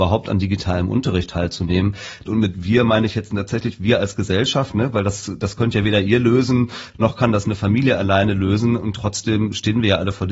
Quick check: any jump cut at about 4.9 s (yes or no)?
no